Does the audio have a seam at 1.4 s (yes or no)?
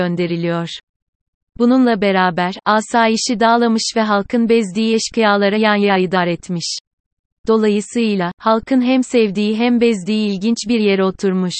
yes